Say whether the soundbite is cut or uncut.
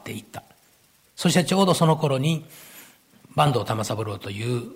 cut